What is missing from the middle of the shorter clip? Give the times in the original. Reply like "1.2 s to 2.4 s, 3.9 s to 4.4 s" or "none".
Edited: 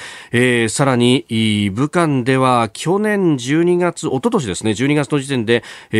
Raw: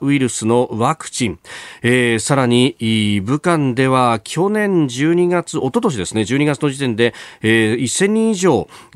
none